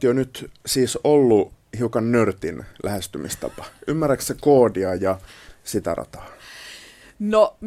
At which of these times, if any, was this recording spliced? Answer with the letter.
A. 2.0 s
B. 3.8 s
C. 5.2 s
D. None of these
D